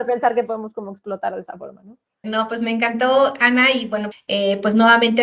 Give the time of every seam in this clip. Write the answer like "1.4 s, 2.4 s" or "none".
2.2 s, 4.1 s